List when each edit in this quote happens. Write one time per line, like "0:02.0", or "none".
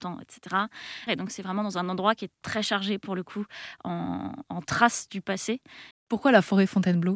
0:01.1
0:05.9